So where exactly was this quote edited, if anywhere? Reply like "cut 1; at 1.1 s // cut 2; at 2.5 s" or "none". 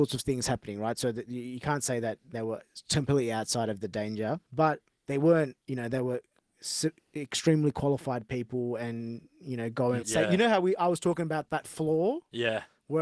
cut 1; at 4.4 s // cut 2; at 10.0 s